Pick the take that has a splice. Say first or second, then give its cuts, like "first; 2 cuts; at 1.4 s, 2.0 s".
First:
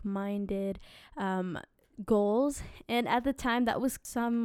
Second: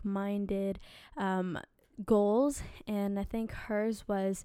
first; 1 cut; at 2.8 s